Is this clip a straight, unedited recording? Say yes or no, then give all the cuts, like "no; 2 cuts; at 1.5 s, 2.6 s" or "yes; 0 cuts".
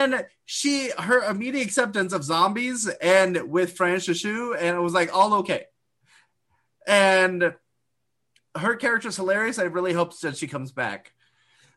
yes; 0 cuts